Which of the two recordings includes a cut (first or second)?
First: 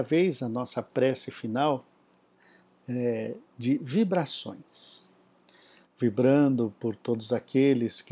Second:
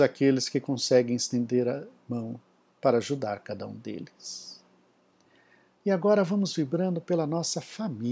first